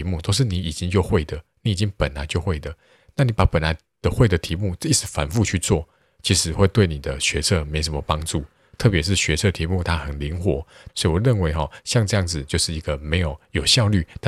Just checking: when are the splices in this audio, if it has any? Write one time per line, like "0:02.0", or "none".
0:10.9